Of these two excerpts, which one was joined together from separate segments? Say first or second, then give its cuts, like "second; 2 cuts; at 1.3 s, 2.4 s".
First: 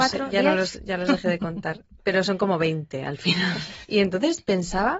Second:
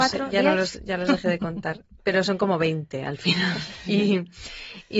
first; 1 cut; at 3.8 s